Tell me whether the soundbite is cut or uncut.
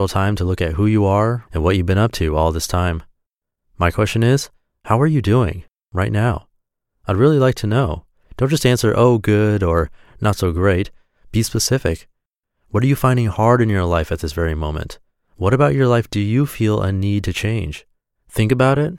cut